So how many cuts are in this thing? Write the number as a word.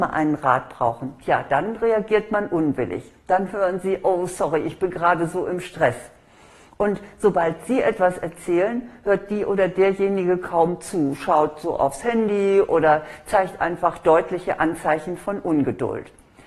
zero